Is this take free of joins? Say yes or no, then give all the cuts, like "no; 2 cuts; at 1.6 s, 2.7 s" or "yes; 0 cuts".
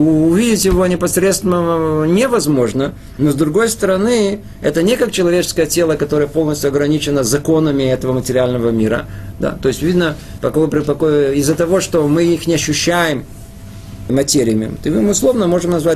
no; 3 cuts; at 9.3 s, 10.4 s, 14.1 s